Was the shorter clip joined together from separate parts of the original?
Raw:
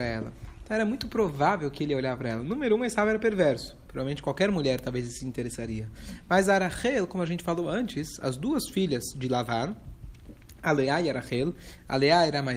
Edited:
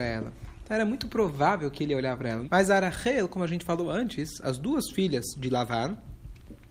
yes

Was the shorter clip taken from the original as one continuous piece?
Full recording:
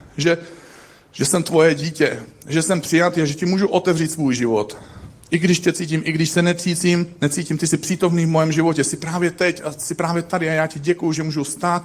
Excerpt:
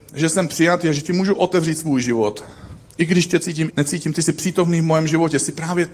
no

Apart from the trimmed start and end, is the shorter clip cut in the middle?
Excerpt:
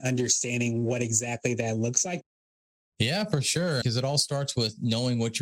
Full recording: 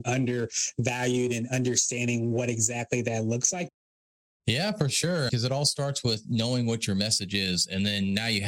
no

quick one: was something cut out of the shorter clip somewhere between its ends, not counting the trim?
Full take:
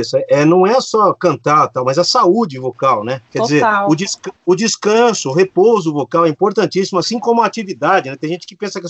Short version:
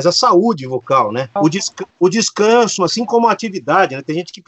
yes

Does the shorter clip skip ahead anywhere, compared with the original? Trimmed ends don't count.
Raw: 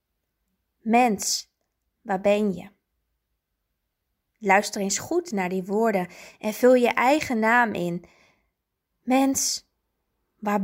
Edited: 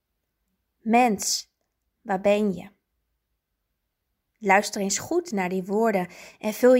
no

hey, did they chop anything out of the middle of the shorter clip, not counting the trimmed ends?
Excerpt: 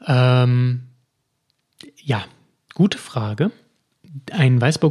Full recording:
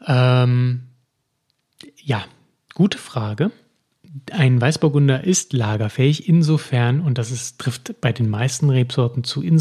no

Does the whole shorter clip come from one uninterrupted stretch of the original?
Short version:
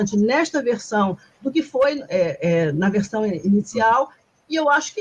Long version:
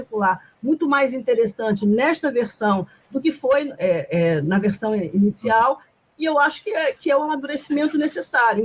yes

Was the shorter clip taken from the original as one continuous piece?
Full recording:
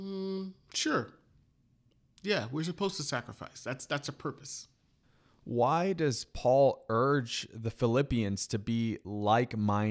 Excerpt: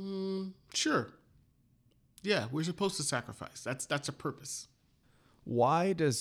yes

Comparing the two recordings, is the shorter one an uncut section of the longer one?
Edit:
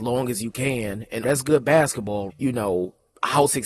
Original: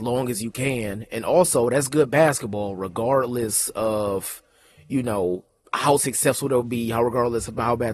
no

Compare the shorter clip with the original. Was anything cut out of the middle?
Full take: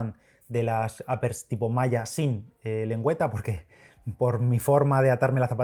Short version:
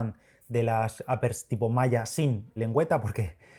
yes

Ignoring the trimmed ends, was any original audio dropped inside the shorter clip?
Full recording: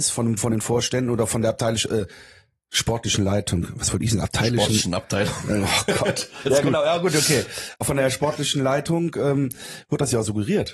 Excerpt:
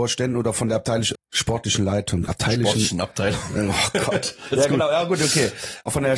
yes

